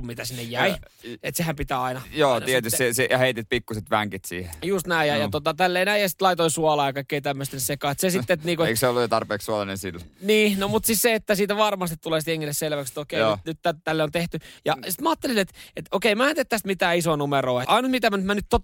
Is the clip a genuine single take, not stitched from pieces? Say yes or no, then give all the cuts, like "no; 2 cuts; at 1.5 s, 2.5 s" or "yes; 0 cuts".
no; 2 cuts; at 14.6 s, 17.7 s